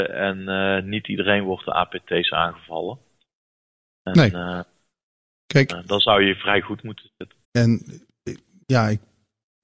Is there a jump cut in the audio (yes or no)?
yes